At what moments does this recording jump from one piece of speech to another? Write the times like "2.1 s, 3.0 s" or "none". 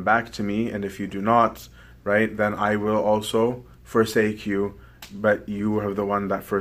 3.7 s